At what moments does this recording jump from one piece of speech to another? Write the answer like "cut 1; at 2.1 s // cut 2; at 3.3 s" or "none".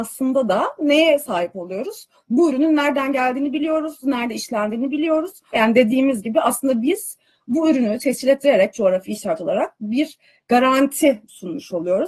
cut 1; at 4.0 s // cut 2; at 5.5 s